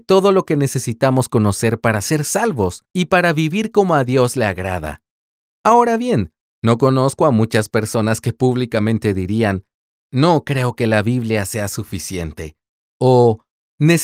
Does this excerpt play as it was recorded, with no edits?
yes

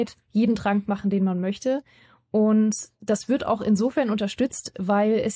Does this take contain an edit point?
no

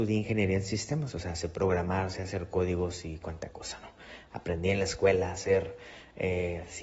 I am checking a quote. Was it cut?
no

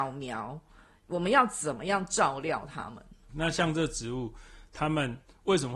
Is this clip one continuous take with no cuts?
no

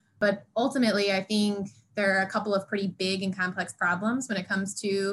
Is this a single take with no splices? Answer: yes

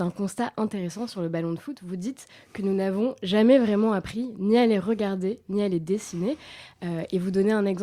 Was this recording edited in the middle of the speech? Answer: no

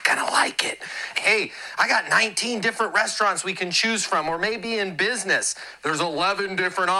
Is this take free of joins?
no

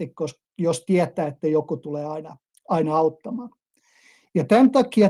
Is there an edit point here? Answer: no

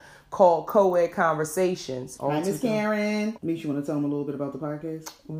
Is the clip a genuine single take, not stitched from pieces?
no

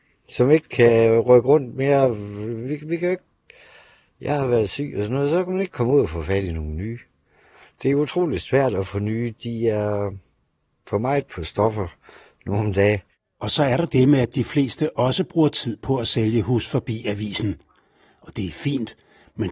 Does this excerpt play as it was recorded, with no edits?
yes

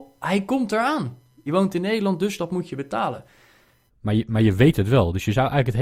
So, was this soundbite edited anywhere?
yes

